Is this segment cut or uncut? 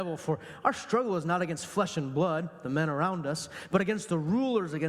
uncut